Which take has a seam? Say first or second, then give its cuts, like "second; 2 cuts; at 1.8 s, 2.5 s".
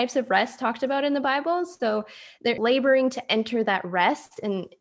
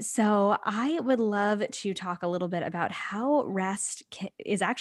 first; 1 cut; at 2.6 s